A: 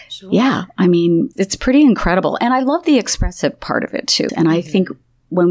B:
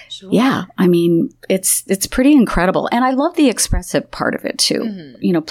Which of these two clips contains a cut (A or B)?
A